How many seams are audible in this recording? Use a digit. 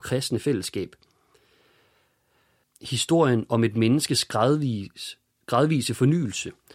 1